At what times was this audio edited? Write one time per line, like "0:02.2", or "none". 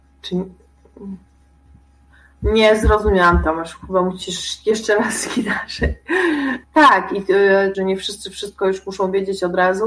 0:06.6
0:07.7